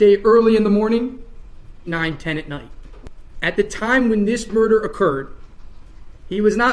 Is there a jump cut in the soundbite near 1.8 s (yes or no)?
yes